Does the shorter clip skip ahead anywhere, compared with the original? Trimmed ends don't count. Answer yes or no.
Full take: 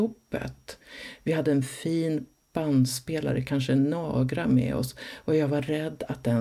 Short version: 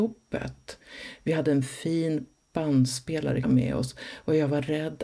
yes